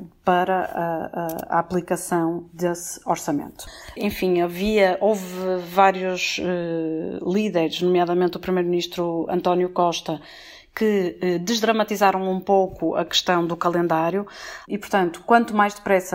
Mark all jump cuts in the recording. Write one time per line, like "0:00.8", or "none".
0:14.6